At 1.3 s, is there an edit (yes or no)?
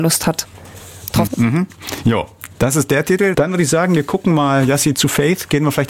yes